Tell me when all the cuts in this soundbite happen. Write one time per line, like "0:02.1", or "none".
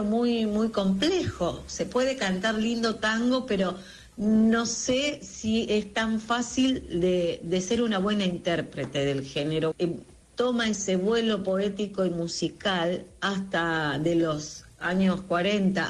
0:09.7